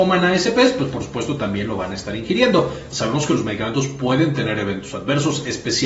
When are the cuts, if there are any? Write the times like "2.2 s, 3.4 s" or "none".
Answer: 2.9 s